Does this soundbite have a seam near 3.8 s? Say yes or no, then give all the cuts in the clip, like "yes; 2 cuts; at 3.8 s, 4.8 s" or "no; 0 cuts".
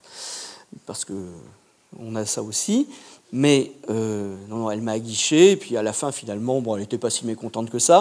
no; 0 cuts